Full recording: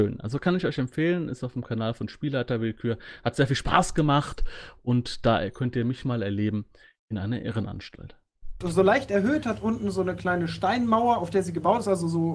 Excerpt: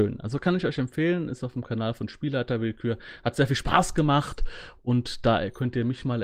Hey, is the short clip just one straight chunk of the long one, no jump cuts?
yes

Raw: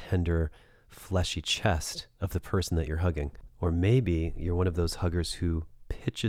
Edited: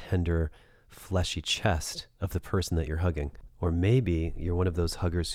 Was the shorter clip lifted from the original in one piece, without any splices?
yes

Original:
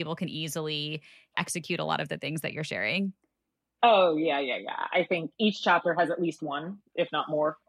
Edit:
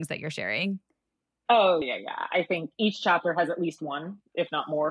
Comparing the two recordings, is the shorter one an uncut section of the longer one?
no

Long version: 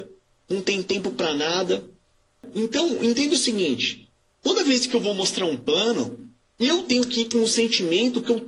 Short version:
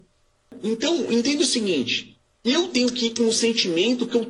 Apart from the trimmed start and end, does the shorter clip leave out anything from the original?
yes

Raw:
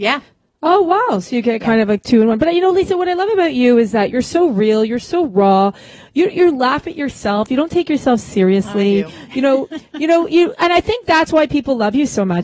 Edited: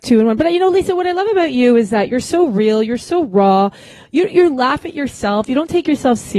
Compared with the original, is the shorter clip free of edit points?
yes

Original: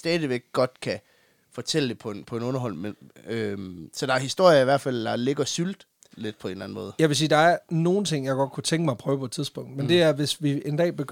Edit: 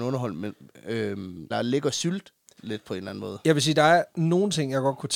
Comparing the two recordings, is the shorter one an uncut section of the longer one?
no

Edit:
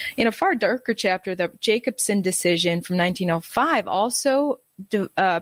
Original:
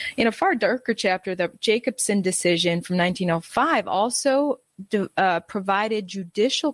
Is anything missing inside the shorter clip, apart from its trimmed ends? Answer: no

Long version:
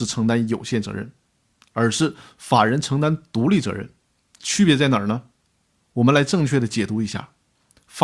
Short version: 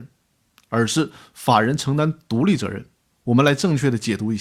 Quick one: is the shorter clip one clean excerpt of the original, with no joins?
no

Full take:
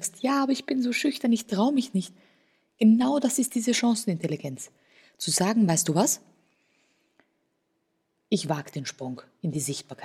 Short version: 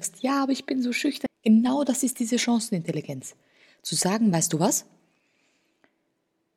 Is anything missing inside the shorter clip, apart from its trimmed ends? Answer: yes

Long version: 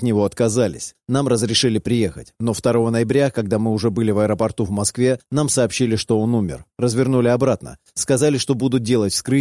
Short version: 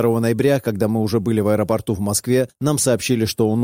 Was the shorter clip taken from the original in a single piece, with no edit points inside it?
yes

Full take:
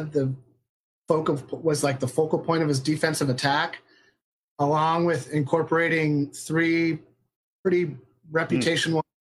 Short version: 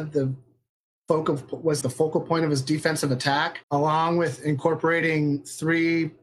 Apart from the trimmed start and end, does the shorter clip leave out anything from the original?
yes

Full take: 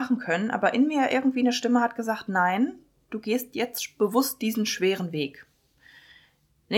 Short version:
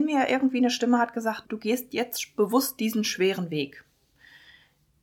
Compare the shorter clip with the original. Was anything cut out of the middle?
yes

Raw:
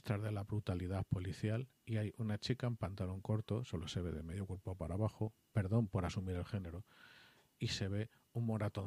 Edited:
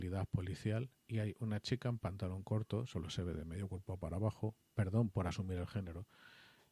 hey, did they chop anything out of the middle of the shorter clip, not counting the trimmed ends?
no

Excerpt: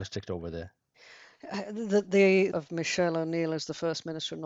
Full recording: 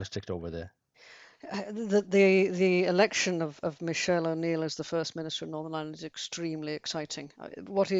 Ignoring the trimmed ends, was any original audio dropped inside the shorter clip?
yes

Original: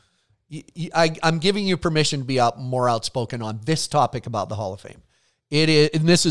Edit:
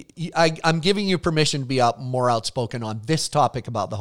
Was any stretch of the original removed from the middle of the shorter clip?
no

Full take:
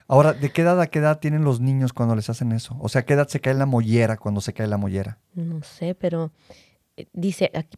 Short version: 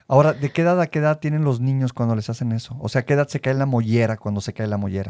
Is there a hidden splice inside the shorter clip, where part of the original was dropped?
no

